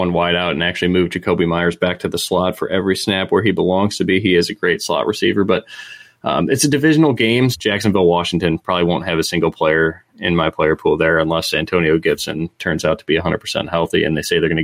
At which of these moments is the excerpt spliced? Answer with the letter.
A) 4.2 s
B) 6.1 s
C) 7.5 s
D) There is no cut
C